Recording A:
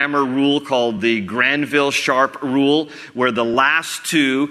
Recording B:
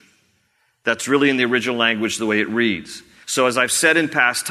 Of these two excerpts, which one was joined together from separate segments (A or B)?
B